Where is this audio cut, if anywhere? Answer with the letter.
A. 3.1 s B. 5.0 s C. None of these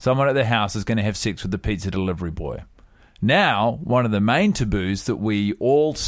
C